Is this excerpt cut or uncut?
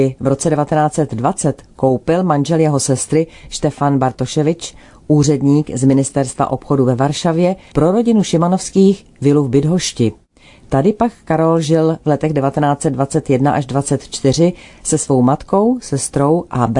uncut